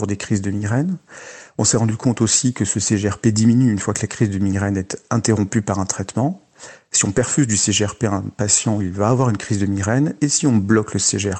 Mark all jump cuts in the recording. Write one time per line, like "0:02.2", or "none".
none